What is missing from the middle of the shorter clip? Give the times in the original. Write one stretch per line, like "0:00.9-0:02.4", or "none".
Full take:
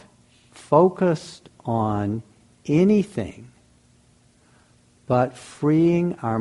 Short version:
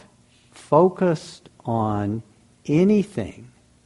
none